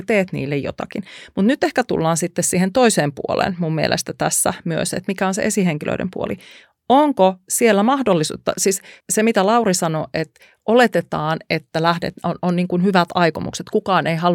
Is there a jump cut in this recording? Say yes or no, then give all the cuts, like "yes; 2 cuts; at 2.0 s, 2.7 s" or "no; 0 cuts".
no; 0 cuts